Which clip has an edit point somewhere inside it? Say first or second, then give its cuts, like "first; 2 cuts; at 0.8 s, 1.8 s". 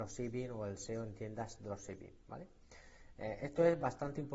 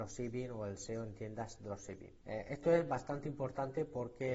second; 1 cut; at 2.2 s